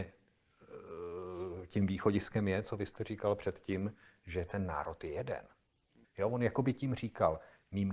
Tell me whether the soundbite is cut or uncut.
cut